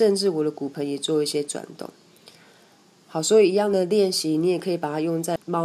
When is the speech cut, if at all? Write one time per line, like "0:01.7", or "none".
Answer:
none